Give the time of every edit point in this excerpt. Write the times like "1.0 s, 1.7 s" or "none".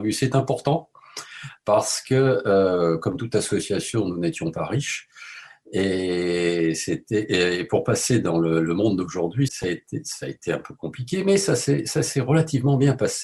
9.5 s